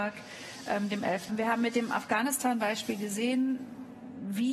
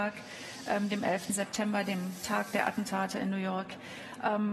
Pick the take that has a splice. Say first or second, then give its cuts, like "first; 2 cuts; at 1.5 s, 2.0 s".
first; 1 cut; at 1.3 s